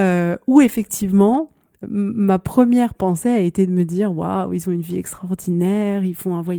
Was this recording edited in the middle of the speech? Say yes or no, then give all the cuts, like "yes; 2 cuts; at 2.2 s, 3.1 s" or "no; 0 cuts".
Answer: yes; 1 cut; at 1.8 s